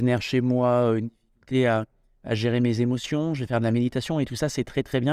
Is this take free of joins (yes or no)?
yes